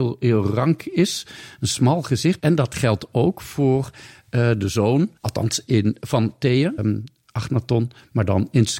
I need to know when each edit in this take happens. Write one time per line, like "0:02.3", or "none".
0:02.4
0:05.2
0:06.8